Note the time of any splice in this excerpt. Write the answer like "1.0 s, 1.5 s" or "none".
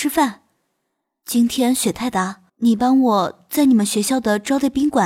2.5 s